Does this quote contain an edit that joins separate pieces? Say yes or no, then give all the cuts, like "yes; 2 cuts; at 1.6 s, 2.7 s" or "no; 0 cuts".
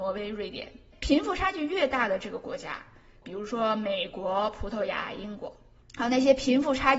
yes; 2 cuts; at 0.9 s, 3.2 s